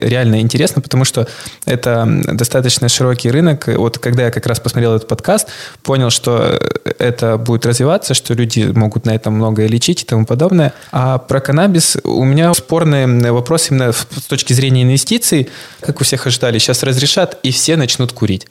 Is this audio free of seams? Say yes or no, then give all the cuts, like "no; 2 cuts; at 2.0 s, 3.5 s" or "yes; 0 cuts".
no; 2 cuts; at 12.5 s, 15.8 s